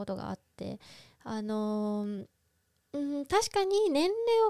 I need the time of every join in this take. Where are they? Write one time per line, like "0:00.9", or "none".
none